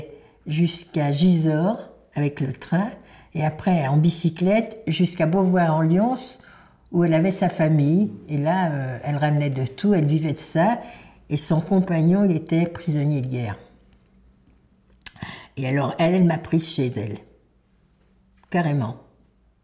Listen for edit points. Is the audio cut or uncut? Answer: uncut